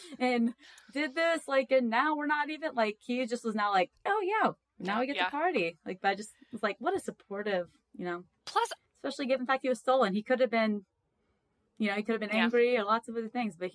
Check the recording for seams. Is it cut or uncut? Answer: cut